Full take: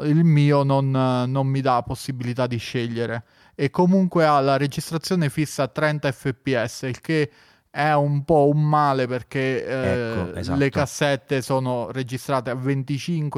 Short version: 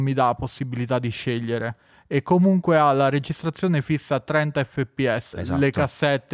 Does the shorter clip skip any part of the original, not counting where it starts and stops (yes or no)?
yes